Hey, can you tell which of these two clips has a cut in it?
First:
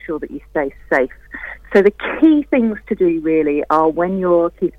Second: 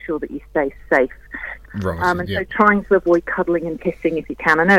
second; 1 cut; at 1.6 s

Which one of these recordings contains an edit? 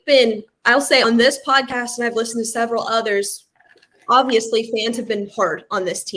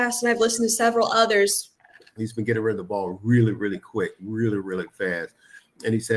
second; 1 cut; at 2.2 s

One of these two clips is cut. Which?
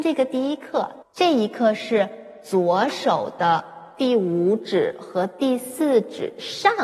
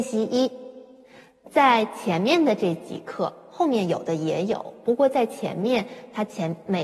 first; 1 cut; at 1.0 s

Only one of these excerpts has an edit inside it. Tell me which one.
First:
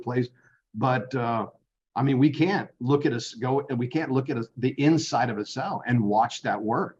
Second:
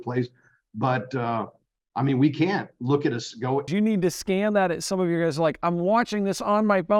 second; 1 cut; at 3.7 s

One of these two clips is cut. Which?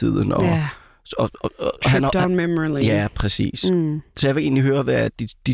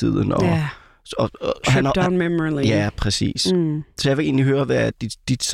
second; 1 cut; at 1.4 s

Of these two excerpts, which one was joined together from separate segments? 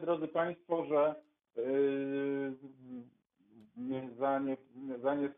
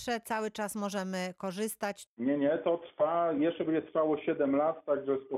second; 1 cut; at 2.1 s

